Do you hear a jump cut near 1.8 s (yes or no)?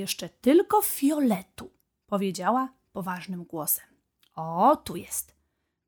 no